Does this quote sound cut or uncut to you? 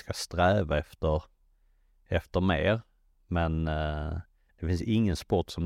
uncut